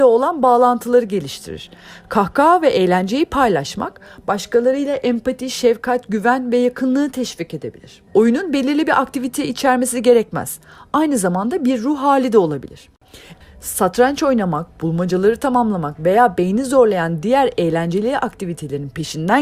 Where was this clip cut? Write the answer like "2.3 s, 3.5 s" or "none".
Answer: 8.1 s, 13.4 s